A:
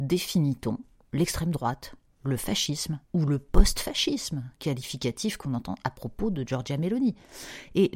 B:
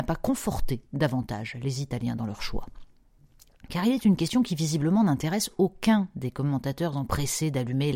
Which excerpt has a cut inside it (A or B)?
A